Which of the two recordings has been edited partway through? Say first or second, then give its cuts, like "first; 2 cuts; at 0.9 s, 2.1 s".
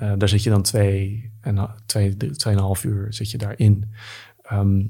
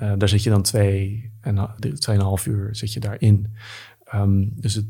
second; 1 cut; at 1.8 s